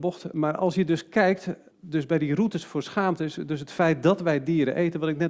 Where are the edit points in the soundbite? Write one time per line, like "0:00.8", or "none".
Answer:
0:01.7